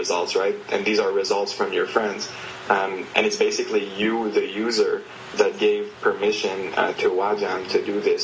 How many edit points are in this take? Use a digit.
0